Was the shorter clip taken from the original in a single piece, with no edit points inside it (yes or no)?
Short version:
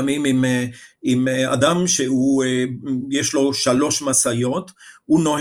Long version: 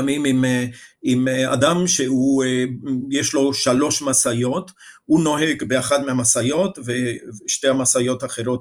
yes